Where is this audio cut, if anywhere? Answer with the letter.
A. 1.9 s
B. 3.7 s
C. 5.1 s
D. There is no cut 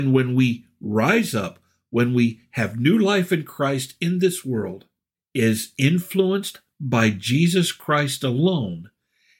C